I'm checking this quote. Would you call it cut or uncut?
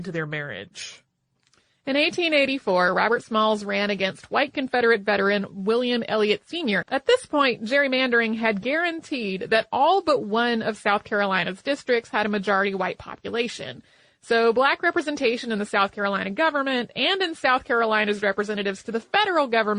cut